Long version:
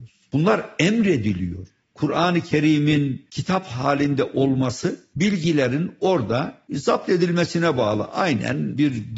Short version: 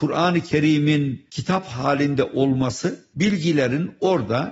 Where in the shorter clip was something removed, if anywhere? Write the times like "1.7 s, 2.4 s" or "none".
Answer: none